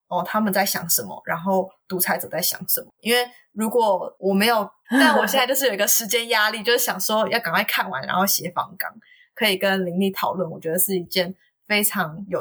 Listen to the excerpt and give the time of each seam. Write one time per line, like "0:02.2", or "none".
0:03.0
0:04.8